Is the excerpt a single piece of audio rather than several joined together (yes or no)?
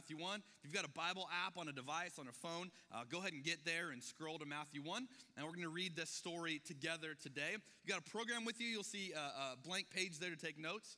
yes